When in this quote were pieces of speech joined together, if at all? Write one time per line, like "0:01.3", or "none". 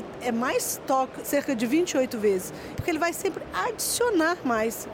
0:01.2
0:02.7